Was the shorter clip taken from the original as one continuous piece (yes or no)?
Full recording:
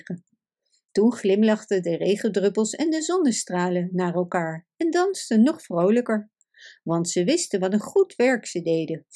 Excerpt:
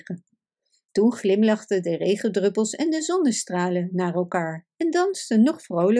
yes